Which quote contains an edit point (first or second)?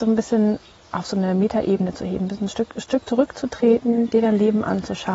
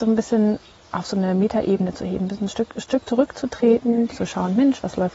second